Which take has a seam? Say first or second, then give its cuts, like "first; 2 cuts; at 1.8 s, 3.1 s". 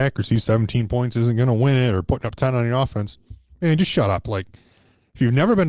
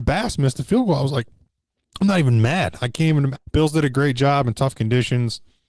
second; 1 cut; at 3.4 s